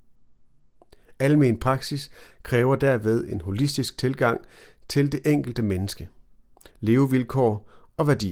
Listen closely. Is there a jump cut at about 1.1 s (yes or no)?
no